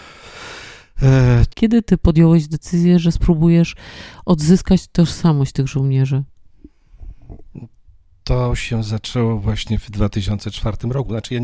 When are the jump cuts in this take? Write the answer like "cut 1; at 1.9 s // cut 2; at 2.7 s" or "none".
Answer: cut 1; at 1.5 s